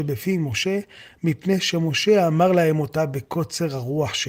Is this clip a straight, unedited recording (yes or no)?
yes